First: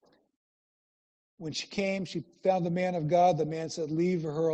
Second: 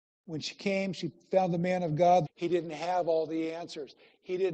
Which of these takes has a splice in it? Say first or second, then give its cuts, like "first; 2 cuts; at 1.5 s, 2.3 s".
second; 1 cut; at 2.2 s